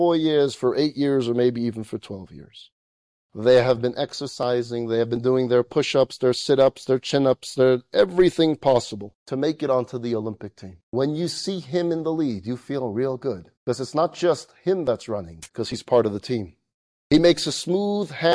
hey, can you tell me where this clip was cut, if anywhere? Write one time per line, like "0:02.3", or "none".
0:10.8
0:13.6
0:15.5